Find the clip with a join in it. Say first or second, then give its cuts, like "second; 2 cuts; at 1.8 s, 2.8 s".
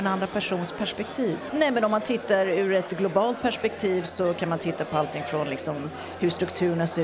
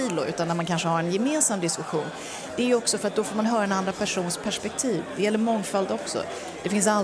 first; 1 cut; at 1.5 s